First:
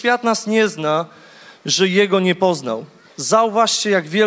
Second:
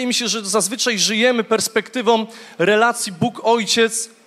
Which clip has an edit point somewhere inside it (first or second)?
first